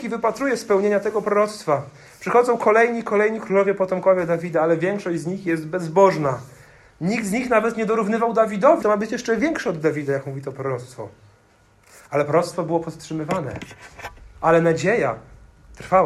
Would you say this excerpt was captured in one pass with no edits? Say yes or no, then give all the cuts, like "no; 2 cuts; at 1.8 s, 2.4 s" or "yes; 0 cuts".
no; 1 cut; at 8.8 s